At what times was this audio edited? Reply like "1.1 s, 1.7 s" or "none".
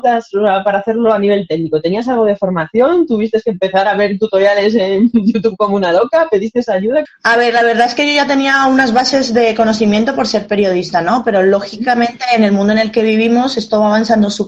7.1 s